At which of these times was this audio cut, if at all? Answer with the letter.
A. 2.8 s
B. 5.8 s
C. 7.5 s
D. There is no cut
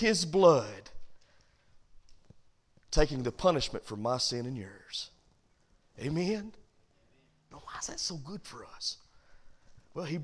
C